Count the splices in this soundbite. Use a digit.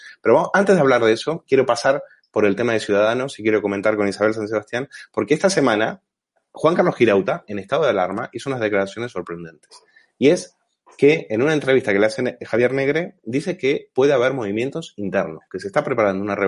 1